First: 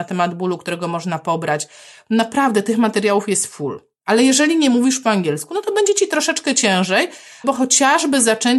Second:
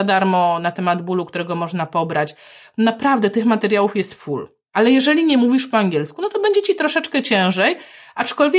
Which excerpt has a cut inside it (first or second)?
first